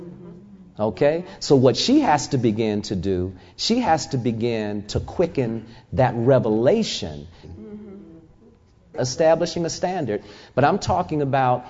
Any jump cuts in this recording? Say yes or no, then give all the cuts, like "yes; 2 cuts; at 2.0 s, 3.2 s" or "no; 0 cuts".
yes; 2 cuts; at 7.4 s, 8.9 s